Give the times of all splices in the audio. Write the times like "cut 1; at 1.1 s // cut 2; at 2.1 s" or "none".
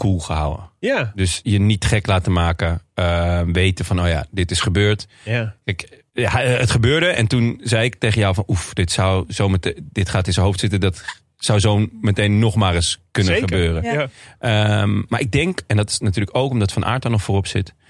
cut 1; at 6.1 s

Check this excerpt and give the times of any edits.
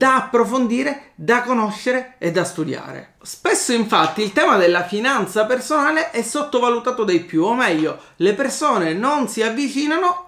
cut 1; at 3.2 s

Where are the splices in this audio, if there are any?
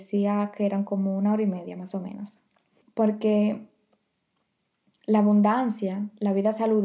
cut 1; at 2.8 s

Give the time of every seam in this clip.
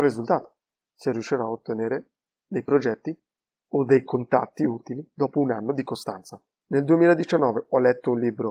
cut 1; at 6.5 s

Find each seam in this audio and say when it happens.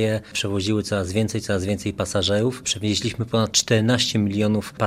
cut 1; at 2.6 s

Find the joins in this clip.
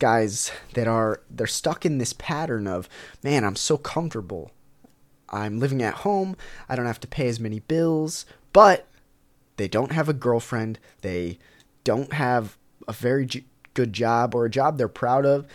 none

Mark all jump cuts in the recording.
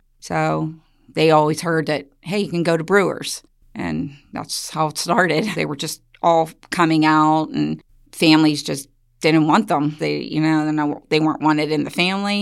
cut 1; at 5.5 s // cut 2; at 10.0 s

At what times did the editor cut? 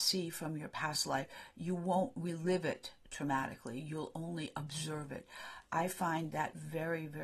none

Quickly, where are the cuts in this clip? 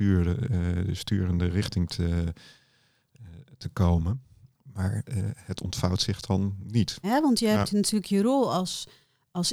cut 1; at 4.5 s // cut 2; at 7.0 s

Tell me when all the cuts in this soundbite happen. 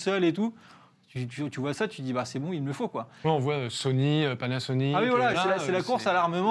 cut 1; at 5.3 s

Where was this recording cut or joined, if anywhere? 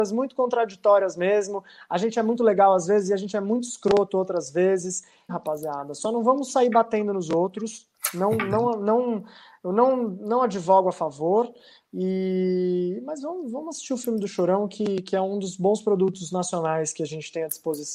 cut 1; at 5.3 s

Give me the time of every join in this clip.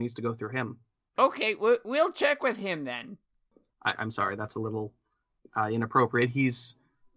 cut 1; at 3.7 s

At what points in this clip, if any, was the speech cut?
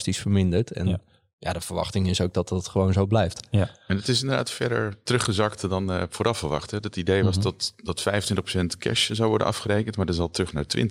none

